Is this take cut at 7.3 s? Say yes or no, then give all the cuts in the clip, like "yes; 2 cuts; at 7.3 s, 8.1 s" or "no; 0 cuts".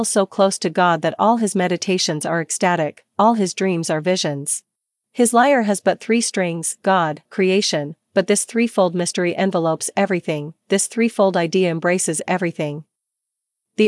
yes; 2 cuts; at 4.9 s, 7.3 s